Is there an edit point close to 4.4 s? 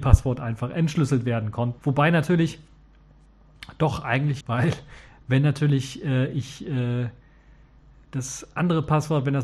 yes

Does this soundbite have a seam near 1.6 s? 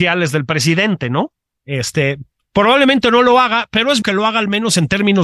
yes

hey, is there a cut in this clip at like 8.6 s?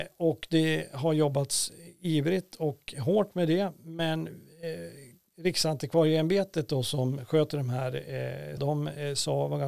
yes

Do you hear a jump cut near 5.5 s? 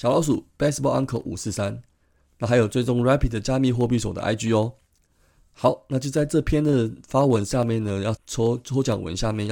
no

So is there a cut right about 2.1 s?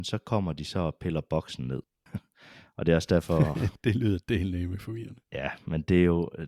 yes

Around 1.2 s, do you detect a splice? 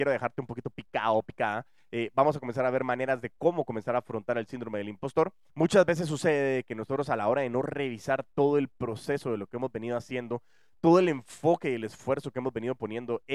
no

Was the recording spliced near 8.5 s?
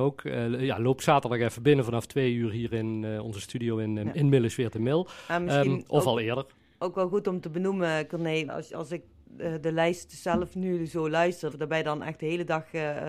yes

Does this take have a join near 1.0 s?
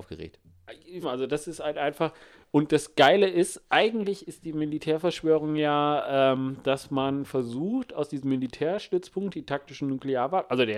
yes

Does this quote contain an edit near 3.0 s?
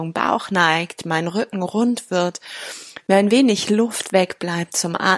no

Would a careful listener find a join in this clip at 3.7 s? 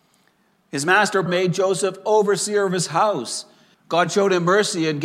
yes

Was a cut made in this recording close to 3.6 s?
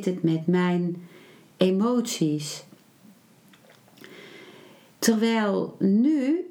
no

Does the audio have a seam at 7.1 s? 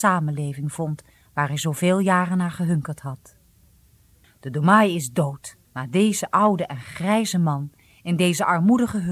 no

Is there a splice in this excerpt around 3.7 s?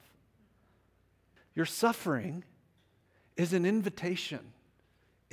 no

